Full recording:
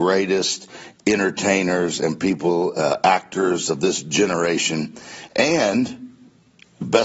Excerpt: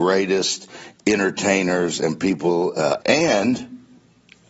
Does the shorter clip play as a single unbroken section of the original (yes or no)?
no